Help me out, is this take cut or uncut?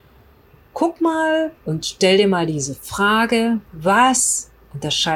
cut